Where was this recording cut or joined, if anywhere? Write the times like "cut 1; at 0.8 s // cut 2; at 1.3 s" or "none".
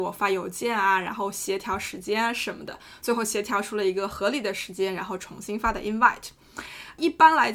none